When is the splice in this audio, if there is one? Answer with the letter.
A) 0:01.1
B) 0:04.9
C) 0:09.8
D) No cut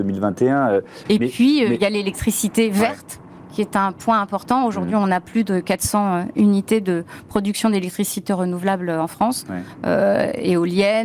A